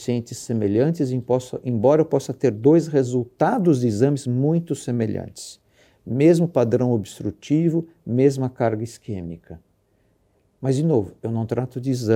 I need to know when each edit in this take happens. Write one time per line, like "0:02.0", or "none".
none